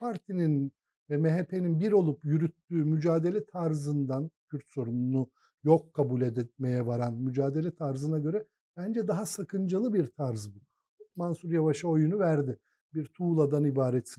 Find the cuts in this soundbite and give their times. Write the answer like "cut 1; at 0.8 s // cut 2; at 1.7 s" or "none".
cut 1; at 11.1 s // cut 2; at 12.8 s

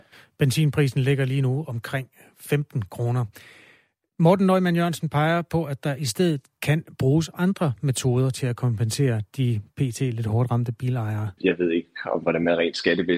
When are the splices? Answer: cut 1; at 11.4 s

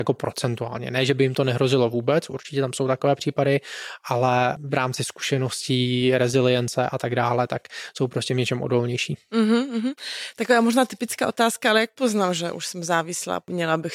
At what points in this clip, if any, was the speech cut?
none

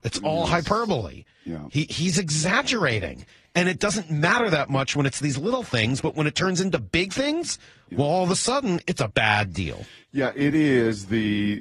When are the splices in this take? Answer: cut 1; at 1.9 s // cut 2; at 9.1 s

